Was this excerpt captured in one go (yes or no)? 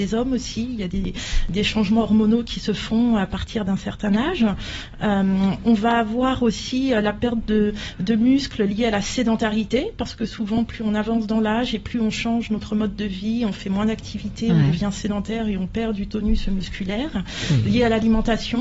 yes